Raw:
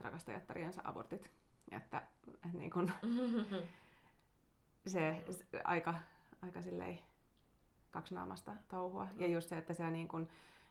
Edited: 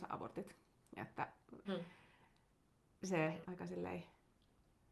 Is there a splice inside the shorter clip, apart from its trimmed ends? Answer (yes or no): yes